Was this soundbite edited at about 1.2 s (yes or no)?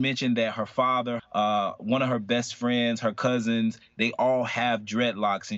yes